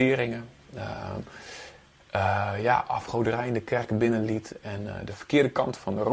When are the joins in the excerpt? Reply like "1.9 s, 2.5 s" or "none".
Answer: none